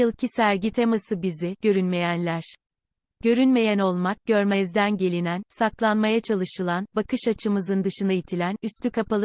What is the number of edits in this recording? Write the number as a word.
one